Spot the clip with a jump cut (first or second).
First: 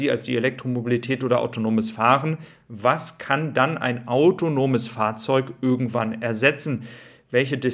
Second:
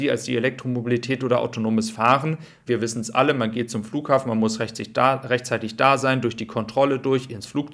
second